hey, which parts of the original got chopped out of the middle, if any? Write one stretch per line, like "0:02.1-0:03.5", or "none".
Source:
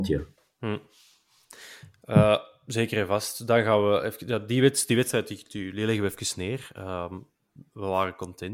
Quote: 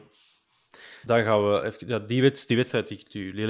0:01.9-0:03.5